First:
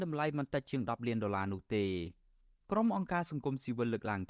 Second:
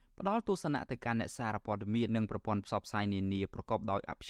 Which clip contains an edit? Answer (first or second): second